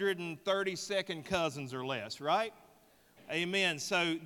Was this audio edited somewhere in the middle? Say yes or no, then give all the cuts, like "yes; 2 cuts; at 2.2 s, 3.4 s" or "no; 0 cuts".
yes; 1 cut; at 3.2 s